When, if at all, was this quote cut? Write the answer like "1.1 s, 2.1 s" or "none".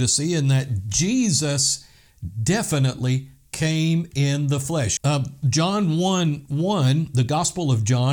5.0 s